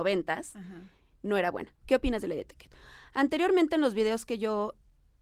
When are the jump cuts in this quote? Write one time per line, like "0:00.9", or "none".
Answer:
0:01.8

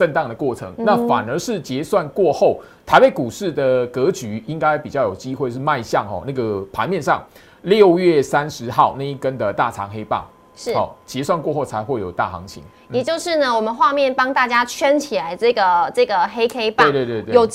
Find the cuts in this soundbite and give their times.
none

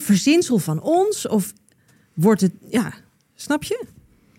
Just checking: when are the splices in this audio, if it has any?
none

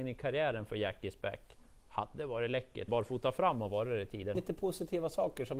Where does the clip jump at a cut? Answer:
0:02.9
0:04.3

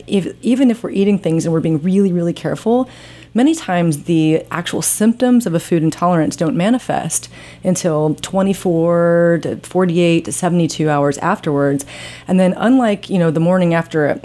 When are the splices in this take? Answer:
none

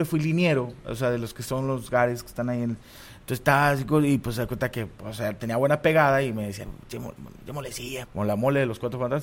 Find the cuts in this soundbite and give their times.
0:06.6
0:08.0

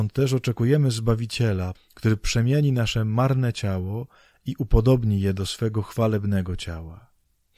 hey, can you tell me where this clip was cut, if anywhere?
0:01.7

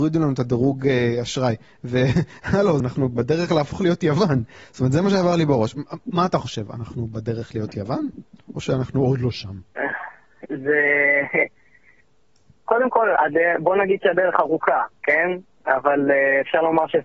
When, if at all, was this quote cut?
0:02.8

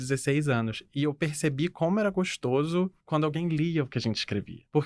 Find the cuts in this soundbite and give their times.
none

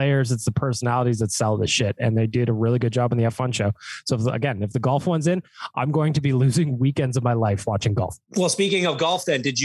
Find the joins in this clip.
0:08.3

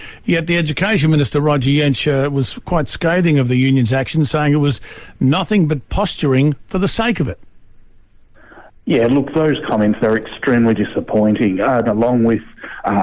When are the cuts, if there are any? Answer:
0:11.8

